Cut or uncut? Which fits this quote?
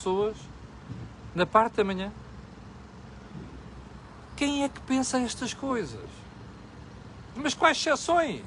cut